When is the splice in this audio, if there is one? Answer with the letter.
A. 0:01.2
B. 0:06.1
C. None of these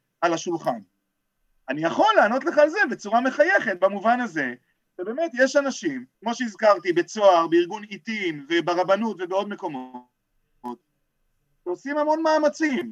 B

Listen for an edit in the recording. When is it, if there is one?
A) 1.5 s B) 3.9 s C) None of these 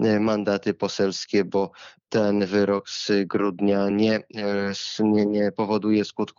C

